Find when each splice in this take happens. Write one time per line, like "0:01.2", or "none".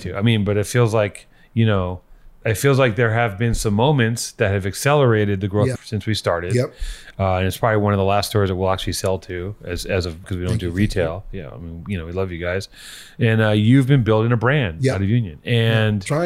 0:05.8
0:10.2